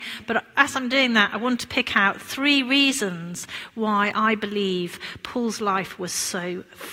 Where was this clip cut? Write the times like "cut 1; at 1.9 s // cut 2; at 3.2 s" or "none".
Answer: none